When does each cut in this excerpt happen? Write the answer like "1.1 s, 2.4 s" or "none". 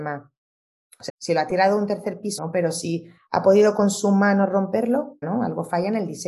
1.1 s, 2.4 s, 5.2 s